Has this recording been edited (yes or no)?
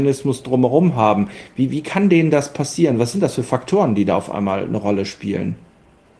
no